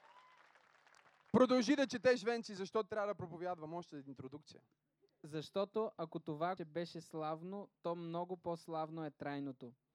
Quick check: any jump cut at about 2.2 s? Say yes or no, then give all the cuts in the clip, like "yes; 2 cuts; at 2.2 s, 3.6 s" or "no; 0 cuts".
no; 1 cut; at 6.6 s